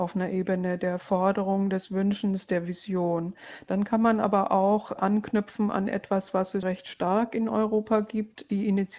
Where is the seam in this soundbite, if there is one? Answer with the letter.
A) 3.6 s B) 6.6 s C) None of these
B